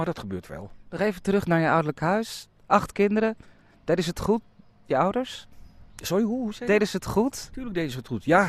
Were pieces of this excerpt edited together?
no; 0 cuts

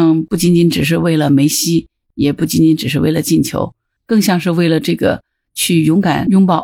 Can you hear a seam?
no; 0 cuts

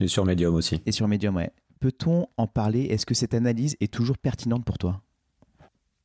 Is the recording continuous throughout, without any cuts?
yes; 0 cuts

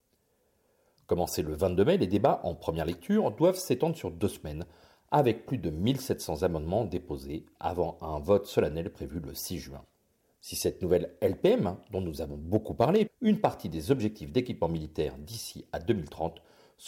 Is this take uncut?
no; 1 cut; at 13.1 s

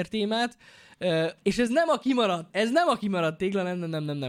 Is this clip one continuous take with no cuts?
no; 2 cuts; at 1.4 s, 2.5 s

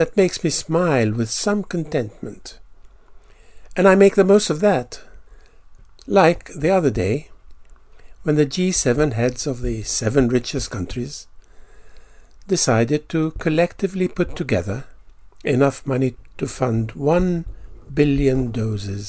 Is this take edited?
no; 0 cuts

